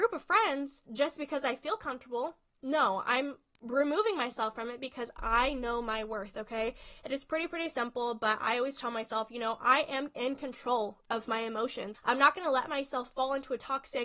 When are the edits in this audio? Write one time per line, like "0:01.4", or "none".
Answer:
0:11.9